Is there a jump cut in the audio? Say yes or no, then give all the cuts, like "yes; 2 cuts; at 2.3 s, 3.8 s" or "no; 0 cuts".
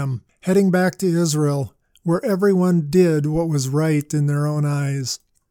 no; 0 cuts